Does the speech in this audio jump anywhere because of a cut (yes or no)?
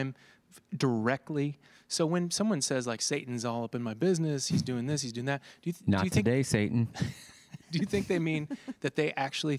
no